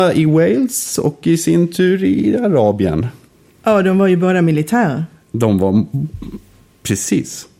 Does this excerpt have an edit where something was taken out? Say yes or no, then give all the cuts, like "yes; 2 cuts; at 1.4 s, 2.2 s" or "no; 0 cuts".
no; 0 cuts